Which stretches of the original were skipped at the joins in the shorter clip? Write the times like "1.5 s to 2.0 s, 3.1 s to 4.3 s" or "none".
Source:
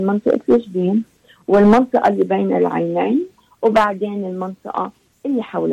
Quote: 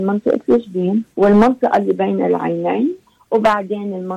1.1 s to 1.4 s